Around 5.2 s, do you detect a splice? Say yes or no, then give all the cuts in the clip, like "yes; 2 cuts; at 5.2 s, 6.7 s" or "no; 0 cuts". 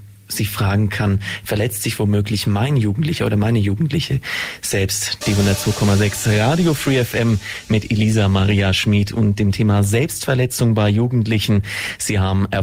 yes; 1 cut; at 5.2 s